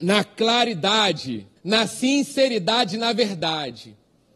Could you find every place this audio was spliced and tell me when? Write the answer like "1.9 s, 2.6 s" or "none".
1.6 s